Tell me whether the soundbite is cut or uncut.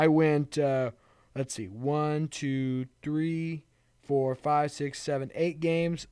uncut